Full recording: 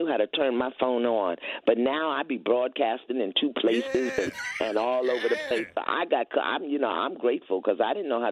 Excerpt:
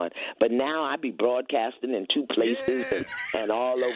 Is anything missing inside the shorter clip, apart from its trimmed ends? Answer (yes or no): no